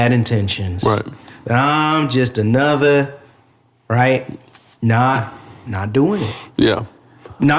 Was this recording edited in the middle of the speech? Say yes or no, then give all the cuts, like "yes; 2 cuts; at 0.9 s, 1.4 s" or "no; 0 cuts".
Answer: no; 0 cuts